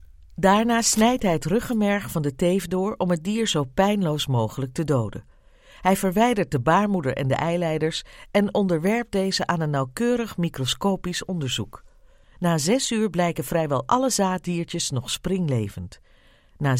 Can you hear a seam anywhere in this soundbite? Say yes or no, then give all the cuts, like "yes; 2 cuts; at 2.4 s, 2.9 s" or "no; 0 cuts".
yes; 1 cut; at 12.2 s